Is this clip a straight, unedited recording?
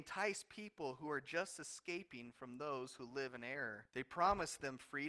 no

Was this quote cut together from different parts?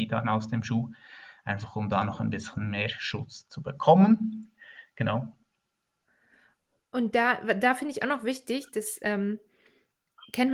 no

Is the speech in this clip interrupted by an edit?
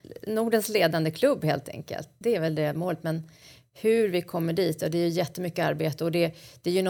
no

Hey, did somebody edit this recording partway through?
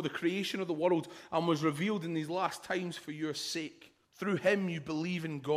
yes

